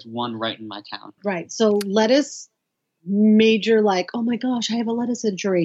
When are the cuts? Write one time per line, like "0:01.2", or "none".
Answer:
0:01.2